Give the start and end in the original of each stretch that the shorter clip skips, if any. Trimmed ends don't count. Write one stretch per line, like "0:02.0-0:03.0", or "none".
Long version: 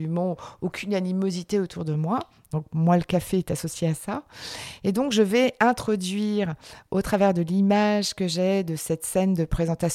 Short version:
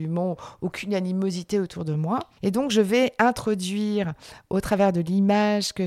0:02.4-0:04.8

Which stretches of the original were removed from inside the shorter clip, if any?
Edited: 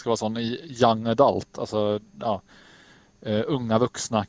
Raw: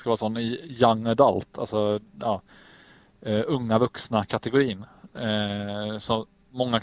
none

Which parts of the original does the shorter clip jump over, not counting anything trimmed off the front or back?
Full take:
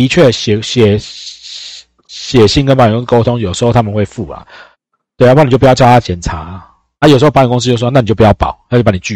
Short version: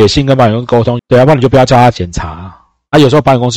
0:03.4-0:05.1

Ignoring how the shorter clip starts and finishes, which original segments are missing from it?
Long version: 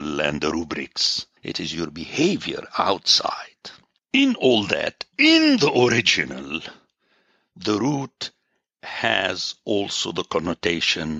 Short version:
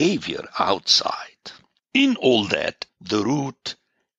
0:05.1-0:07.4

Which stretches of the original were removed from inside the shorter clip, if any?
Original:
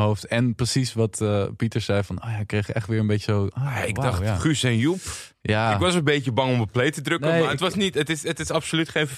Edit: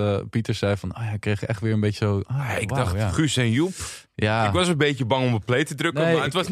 none

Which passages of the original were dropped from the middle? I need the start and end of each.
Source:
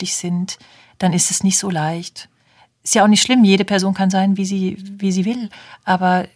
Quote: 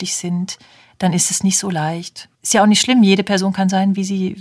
0:02.3-0:02.8

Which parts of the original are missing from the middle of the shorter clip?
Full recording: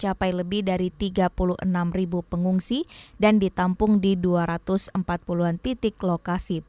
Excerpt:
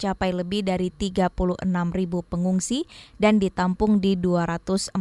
none

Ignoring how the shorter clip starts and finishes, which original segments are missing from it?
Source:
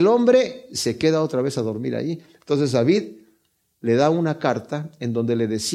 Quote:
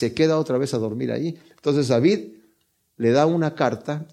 none

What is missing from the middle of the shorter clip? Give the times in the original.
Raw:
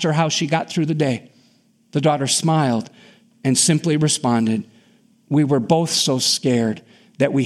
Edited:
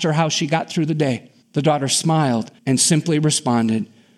0:01.4-0:01.8
0:03.0-0:03.4

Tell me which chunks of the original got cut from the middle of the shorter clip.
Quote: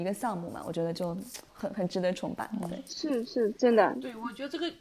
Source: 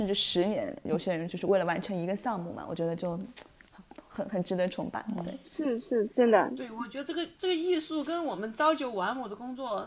0:03.5-0:04.0

